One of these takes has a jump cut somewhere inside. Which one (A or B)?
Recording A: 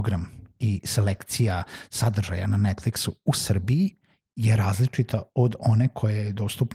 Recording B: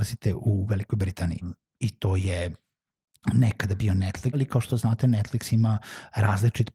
B